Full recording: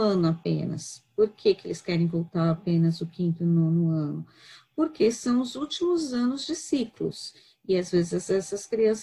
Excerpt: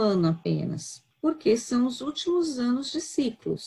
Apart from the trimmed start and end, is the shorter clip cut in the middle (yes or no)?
yes